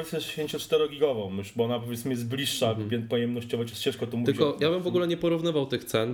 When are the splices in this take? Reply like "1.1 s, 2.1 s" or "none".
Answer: none

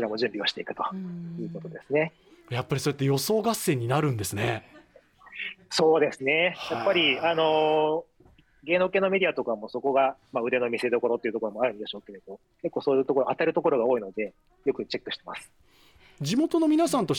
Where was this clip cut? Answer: none

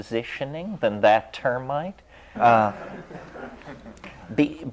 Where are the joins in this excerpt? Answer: 2.3 s

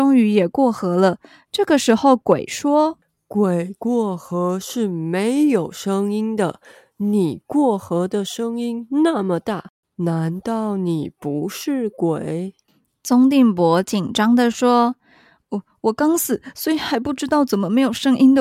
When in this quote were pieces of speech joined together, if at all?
none

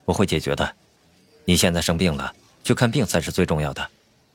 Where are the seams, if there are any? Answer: none

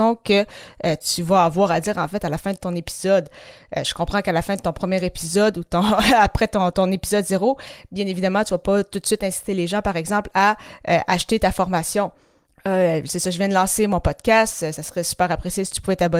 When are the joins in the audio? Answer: 12.5 s

